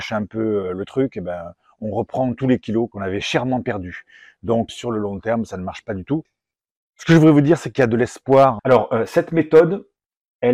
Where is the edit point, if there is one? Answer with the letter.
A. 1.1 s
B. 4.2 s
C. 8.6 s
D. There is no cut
C